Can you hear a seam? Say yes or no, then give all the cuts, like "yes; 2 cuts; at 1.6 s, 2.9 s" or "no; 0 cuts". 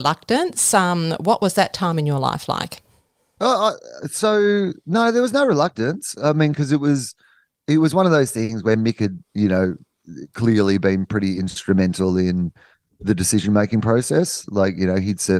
no; 0 cuts